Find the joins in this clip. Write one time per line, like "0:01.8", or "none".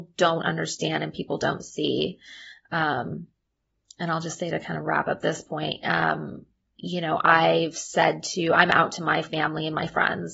none